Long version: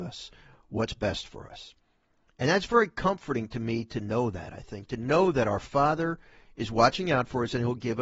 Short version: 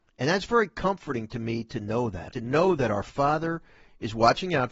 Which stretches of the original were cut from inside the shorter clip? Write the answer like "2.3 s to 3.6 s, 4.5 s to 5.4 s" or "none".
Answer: 4.5 s to 4.9 s